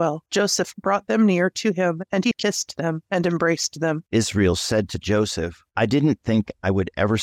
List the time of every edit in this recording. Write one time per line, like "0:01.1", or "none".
none